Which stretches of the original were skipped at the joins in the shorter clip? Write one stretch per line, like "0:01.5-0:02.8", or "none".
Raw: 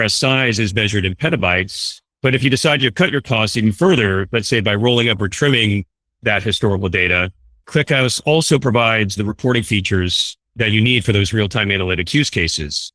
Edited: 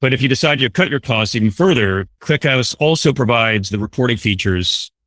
0:04.3-0:07.5